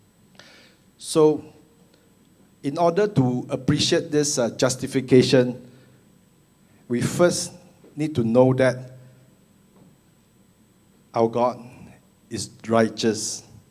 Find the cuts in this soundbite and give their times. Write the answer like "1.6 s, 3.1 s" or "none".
none